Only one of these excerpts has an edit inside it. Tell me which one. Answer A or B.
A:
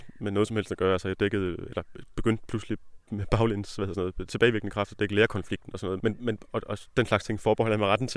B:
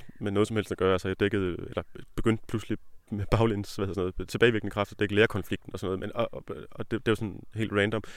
A